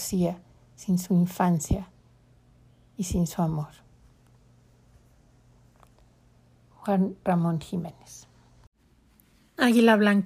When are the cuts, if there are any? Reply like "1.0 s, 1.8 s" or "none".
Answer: none